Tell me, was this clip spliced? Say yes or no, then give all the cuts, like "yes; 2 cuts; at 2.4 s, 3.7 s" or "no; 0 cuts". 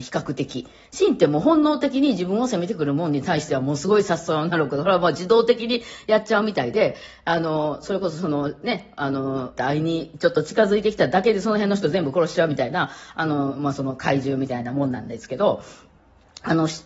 yes; 1 cut; at 9.6 s